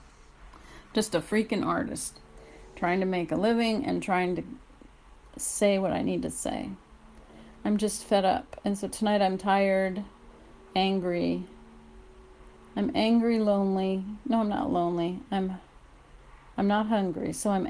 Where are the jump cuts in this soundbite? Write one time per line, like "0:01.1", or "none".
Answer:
none